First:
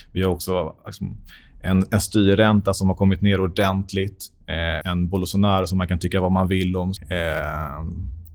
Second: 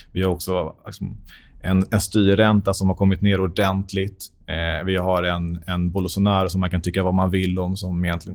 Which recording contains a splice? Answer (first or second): first